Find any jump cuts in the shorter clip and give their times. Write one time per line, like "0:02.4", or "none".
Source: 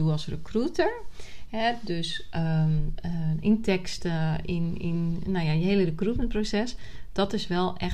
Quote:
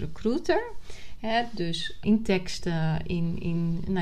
0:02.0